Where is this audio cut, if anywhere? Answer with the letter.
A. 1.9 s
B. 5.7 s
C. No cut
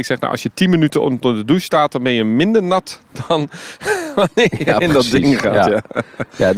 C